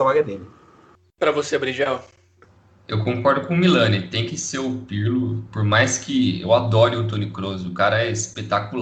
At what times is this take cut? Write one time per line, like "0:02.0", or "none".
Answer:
none